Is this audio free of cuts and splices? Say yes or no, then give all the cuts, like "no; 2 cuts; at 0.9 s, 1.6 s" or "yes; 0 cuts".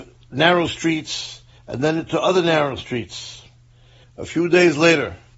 no; 2 cuts; at 1.6 s, 4.0 s